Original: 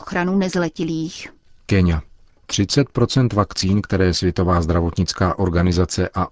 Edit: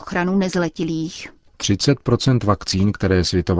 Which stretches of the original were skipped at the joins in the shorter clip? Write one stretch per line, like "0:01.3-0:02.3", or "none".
0:01.5-0:02.4